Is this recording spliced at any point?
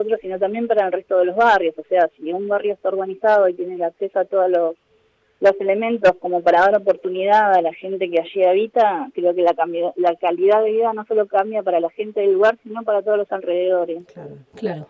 no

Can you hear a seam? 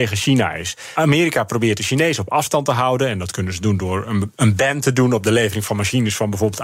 no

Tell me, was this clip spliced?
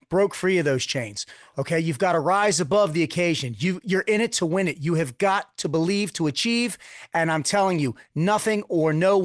no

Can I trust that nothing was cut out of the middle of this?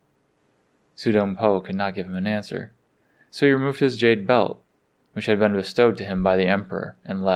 yes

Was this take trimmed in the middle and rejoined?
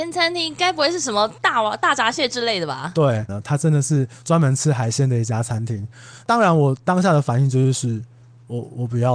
yes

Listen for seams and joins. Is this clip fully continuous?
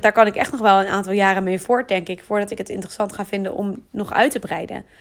yes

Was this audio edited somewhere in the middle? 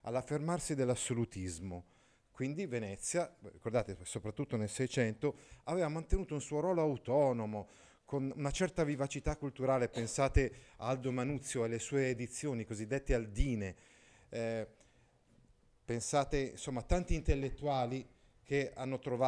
no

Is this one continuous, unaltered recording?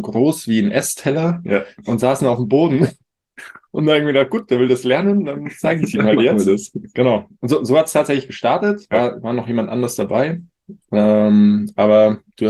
yes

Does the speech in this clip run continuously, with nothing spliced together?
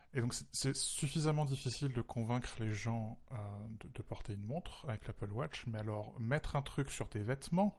yes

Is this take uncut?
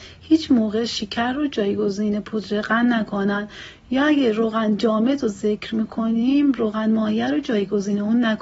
yes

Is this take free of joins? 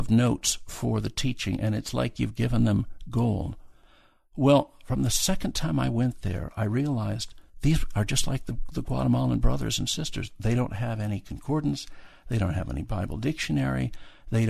no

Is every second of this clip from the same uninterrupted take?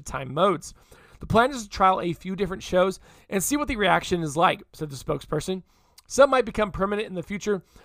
yes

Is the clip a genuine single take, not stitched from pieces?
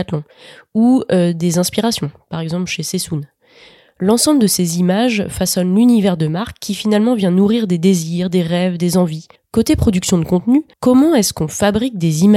no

